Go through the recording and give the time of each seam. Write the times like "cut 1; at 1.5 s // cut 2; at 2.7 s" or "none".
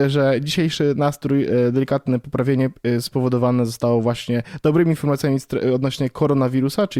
none